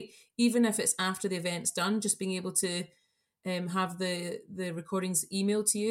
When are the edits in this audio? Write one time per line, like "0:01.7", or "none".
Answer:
none